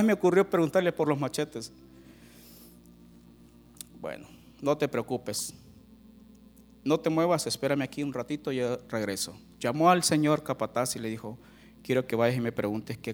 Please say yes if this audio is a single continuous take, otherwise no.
yes